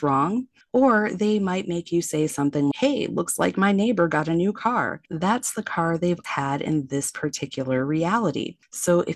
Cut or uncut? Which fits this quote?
cut